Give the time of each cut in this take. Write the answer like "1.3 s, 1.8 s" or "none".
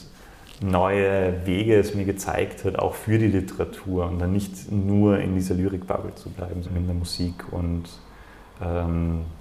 6.6 s